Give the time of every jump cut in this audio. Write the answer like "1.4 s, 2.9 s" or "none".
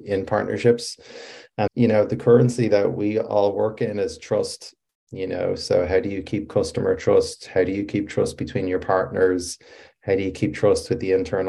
1.7 s